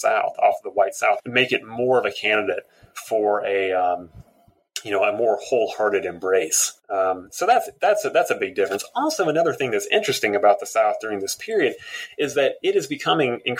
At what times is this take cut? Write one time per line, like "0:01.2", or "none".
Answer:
0:01.2
0:06.8